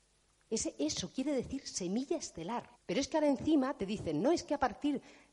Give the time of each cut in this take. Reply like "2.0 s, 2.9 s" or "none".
2.7 s